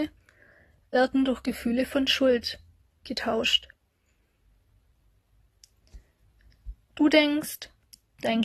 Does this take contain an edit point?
no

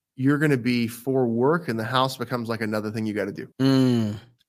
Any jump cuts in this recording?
yes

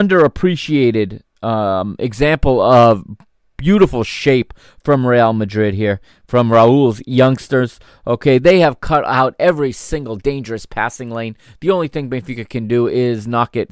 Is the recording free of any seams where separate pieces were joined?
yes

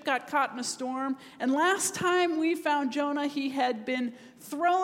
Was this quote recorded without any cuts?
yes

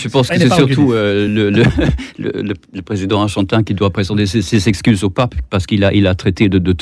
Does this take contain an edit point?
no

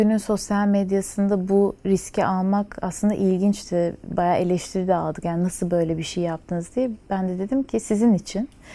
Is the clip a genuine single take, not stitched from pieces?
yes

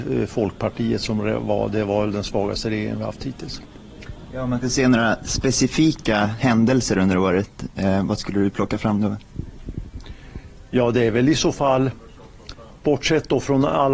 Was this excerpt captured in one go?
yes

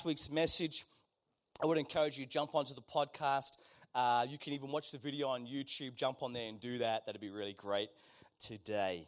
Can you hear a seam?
no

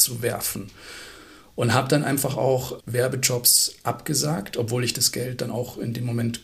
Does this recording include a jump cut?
yes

